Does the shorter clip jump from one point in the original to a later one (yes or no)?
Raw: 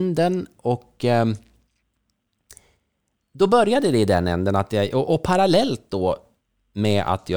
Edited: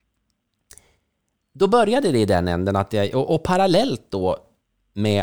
no